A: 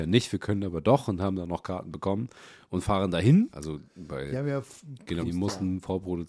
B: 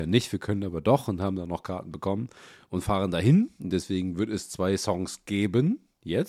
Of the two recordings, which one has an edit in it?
A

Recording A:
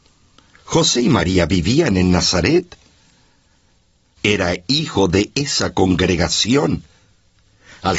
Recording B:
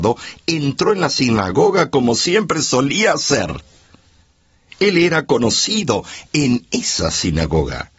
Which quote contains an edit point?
A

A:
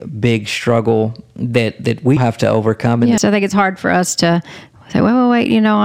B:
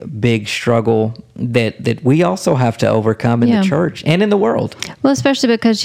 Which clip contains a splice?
A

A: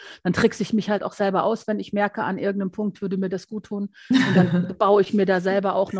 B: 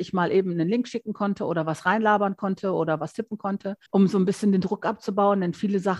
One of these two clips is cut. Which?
B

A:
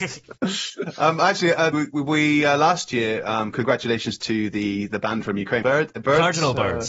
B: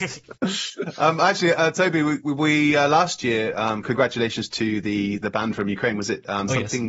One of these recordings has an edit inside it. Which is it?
A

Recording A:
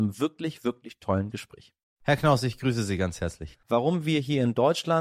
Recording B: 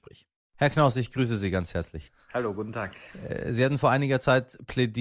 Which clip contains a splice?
A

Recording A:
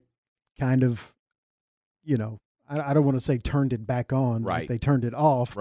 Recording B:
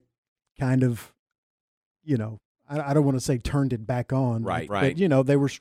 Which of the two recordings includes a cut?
B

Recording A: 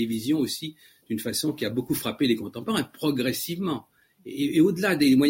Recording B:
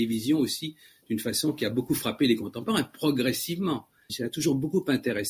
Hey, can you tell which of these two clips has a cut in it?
B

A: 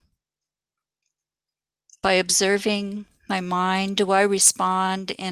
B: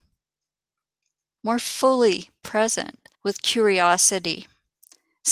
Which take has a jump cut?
B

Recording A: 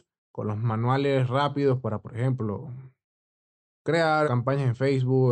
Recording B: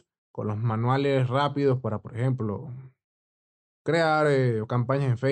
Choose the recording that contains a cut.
A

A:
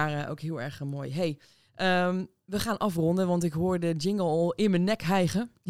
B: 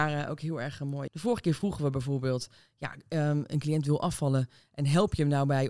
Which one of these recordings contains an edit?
B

